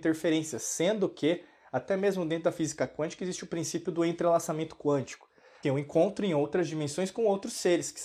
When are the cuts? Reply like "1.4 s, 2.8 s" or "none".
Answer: 5.6 s